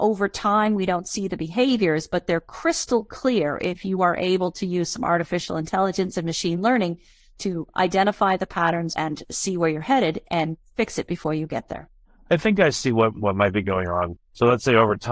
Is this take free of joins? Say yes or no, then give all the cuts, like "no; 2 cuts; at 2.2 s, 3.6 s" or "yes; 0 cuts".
no; 2 cuts; at 8.9 s, 14.2 s